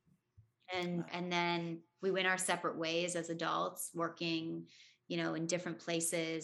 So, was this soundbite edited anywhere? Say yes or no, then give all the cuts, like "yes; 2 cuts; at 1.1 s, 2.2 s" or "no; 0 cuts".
yes; 1 cut; at 1.1 s